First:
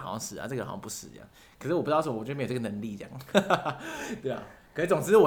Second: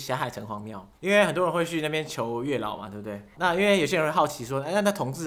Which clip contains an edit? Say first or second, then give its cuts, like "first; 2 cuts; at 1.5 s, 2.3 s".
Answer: second; 2 cuts; at 0.9 s, 3.3 s